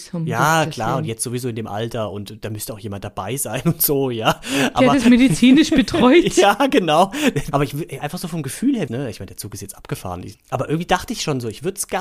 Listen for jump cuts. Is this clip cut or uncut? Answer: cut